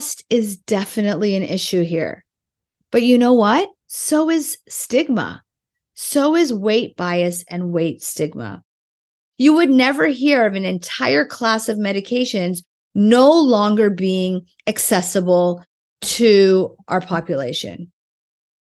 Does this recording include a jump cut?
yes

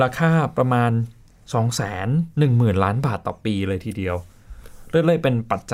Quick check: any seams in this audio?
yes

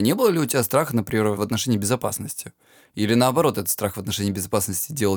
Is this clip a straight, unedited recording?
yes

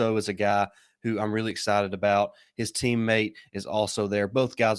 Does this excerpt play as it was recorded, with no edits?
yes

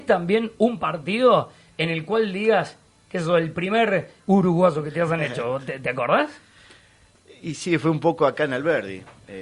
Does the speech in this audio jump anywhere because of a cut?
yes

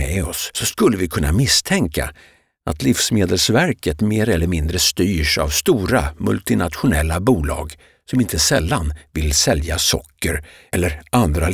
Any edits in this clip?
no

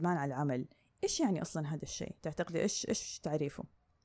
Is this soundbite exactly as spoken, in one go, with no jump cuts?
yes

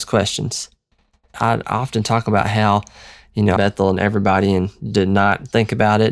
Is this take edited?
yes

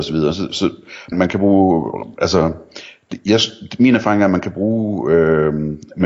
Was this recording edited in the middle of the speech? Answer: yes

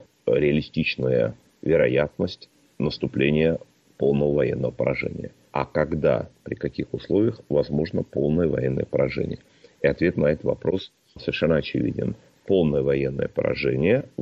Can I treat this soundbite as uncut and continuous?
no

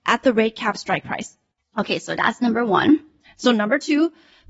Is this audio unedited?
yes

